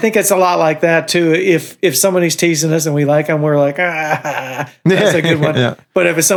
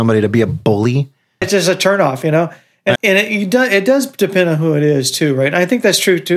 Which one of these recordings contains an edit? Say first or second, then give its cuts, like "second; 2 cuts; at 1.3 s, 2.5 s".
second; 2 cuts; at 1.4 s, 3.0 s